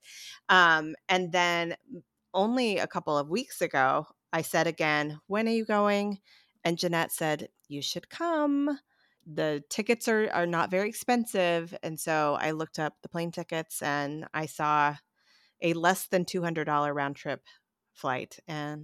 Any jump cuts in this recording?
no; 0 cuts

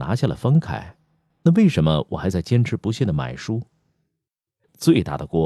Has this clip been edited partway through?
no; 0 cuts

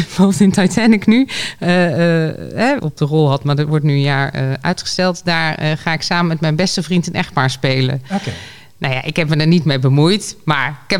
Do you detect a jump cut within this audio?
yes; 1 cut; at 2.8 s

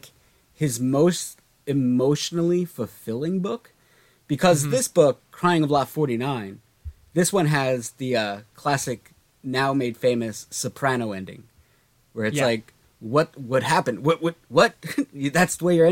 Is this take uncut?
yes; 0 cuts

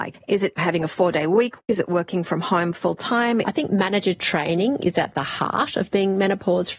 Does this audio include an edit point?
yes; 1 cut; at 3.4 s

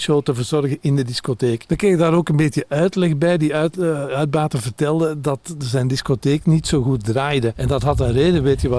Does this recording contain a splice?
no; 0 cuts

